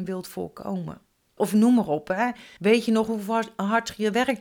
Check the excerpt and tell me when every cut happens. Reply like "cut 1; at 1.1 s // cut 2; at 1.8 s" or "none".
cut 1; at 1.4 s // cut 2; at 2.6 s